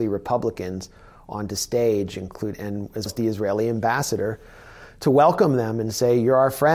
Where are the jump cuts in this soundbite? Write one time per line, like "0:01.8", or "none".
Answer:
0:03.1